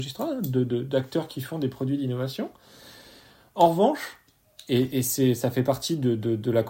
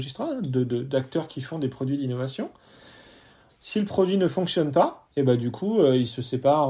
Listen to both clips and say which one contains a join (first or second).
second